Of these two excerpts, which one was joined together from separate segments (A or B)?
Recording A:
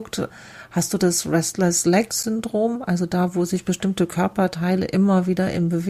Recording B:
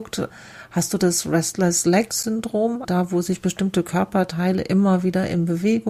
B